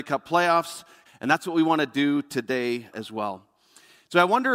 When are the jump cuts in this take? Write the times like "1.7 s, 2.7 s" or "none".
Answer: 1.1 s, 2.9 s